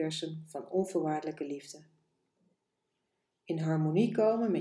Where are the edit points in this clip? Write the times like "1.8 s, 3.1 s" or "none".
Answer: none